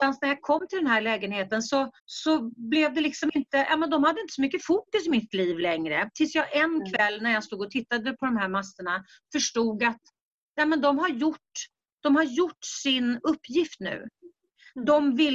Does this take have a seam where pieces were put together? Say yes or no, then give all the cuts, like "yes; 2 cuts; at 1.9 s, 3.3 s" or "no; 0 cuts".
yes; 1 cut; at 2.0 s